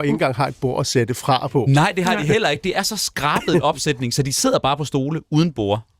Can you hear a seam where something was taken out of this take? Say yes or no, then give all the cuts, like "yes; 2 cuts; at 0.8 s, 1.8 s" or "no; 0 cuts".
no; 0 cuts